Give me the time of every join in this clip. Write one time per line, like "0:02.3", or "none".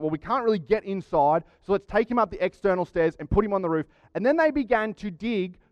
none